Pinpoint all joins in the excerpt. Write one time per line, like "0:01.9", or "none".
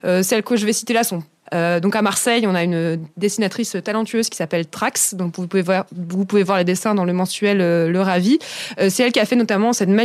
0:01.4